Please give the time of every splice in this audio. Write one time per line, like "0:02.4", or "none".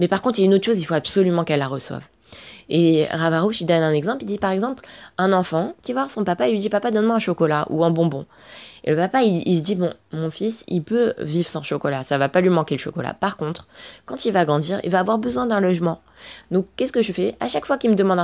none